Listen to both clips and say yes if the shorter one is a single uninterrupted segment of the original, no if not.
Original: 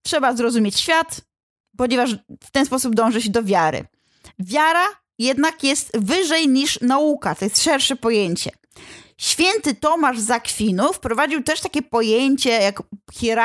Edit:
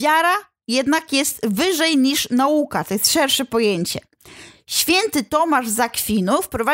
yes